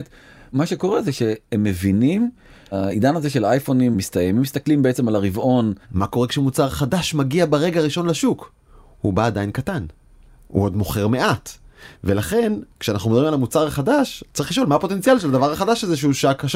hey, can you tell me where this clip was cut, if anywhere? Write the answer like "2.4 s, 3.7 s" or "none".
5.8 s